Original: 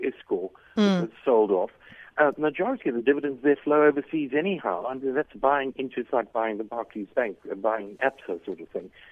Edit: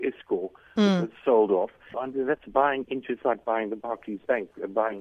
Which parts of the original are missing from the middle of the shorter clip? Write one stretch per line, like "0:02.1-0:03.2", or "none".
0:01.9-0:04.8